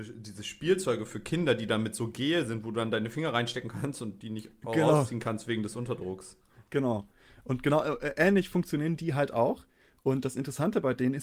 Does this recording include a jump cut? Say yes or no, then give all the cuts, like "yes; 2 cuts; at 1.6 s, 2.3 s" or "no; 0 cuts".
no; 0 cuts